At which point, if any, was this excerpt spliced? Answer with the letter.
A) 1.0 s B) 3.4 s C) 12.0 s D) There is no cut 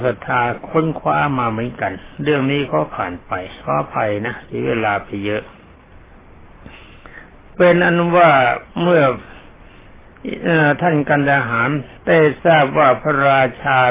C